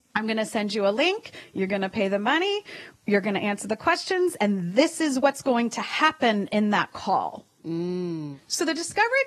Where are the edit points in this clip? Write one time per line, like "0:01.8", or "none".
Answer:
0:04.7
0:07.6

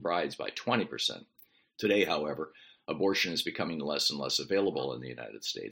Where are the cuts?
0:01.7

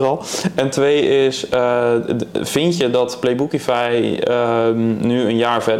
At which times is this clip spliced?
none

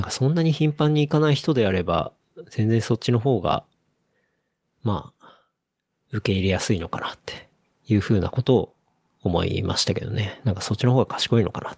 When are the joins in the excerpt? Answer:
none

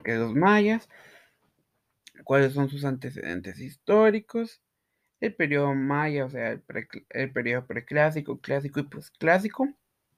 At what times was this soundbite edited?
none

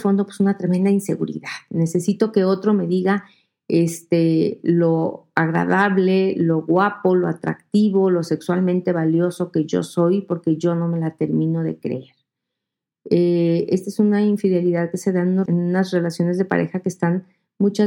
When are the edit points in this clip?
0:12.9
0:15.5

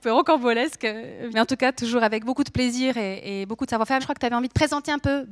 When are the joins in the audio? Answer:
0:01.3
0:04.0

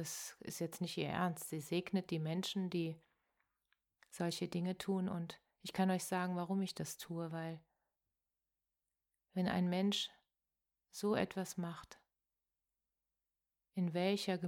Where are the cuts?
none

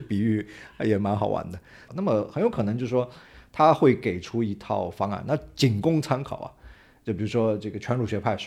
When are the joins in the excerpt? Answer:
0:01.9

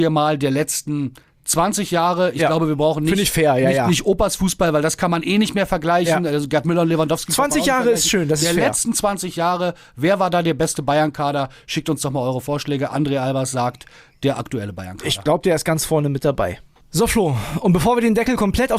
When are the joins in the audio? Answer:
none

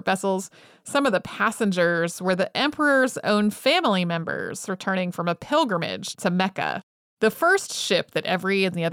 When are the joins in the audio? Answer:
none

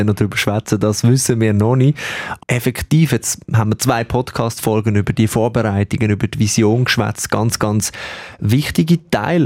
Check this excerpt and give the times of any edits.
0:02.4

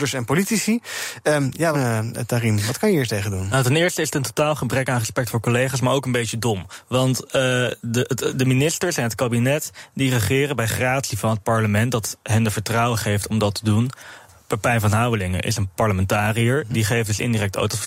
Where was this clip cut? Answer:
0:01.7

